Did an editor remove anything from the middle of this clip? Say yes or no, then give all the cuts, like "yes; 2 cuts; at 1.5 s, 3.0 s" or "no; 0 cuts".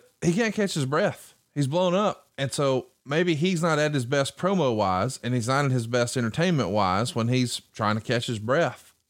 no; 0 cuts